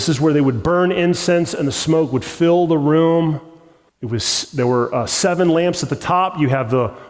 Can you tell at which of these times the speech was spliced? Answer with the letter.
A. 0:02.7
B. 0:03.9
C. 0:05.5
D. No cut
B